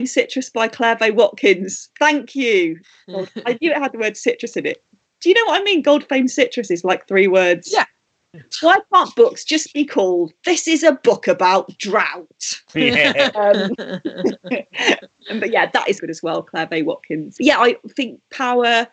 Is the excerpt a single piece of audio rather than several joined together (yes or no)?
no